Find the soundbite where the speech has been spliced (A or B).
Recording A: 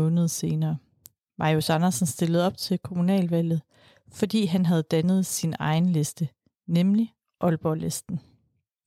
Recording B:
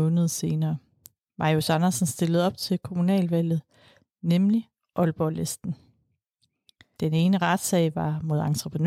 B